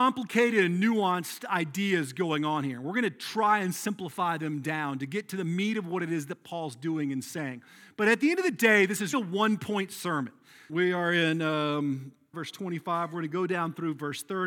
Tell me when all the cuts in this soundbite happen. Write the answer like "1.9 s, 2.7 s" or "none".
9.1 s, 10.7 s, 12.3 s

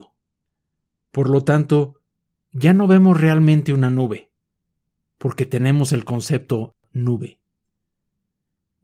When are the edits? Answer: 1.0 s

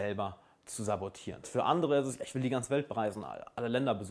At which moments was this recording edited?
1.4 s

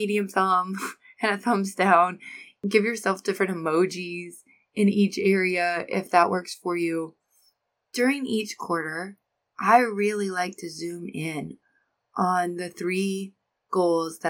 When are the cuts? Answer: none

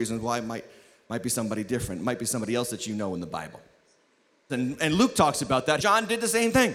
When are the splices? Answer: 4.5 s, 5.8 s

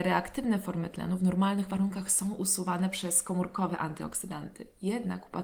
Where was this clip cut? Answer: none

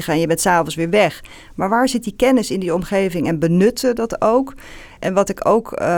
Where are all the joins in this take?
none

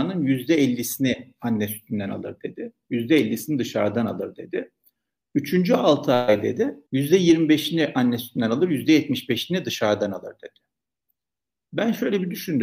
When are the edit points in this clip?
6.9 s

